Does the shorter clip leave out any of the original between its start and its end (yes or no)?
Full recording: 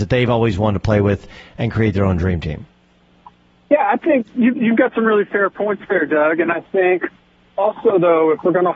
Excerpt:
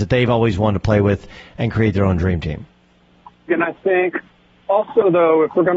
yes